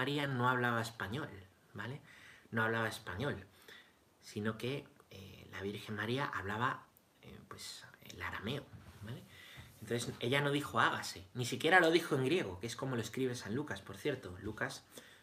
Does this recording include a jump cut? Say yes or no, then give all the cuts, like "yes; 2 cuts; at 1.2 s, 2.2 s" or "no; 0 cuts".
no; 0 cuts